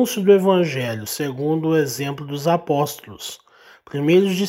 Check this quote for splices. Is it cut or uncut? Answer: uncut